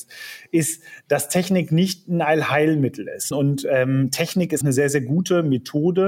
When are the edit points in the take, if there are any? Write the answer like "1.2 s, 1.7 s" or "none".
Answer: 3.3 s, 4.6 s